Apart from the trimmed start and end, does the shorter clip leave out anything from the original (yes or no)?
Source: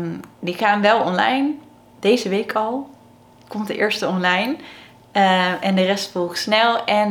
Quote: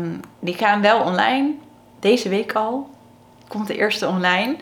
no